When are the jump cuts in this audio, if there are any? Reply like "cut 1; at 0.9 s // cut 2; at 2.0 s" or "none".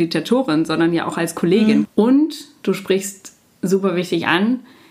cut 1; at 1.8 s